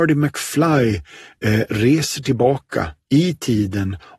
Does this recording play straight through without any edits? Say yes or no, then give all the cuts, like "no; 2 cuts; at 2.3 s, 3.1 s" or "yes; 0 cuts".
yes; 0 cuts